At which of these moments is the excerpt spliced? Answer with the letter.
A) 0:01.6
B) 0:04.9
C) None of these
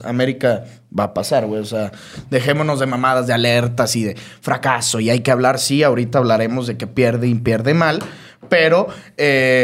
C